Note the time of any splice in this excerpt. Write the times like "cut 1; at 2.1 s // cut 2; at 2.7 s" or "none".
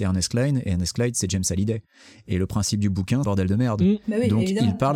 cut 1; at 3.2 s